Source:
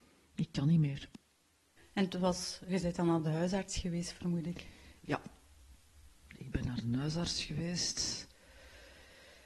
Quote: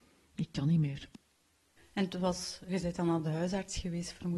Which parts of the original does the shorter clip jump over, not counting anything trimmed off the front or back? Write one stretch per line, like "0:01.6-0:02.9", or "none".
none